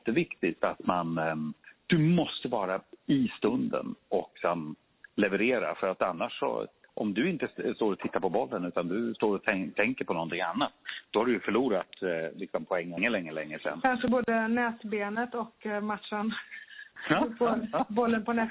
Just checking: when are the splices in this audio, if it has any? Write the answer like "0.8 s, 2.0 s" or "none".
none